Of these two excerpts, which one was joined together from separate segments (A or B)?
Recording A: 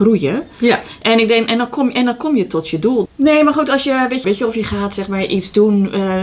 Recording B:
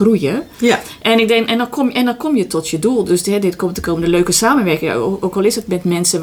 A